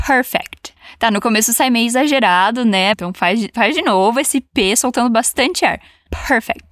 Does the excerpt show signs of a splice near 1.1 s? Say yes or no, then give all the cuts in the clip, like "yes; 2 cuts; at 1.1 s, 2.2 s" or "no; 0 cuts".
no; 1 cut; at 2.9 s